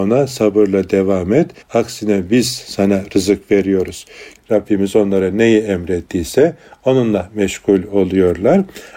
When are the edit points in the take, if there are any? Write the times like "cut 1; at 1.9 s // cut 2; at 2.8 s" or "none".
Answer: cut 1; at 1.6 s // cut 2; at 4.4 s